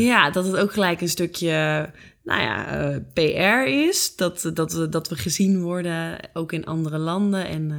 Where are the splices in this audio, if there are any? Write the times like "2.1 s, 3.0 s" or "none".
none